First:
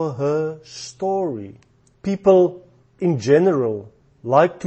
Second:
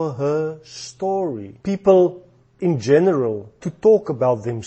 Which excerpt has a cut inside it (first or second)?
second